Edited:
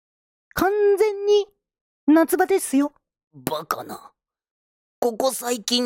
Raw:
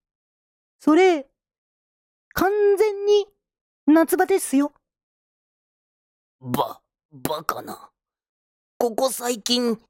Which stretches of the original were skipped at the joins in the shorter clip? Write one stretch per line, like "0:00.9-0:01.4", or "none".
0:05.1-0:07.0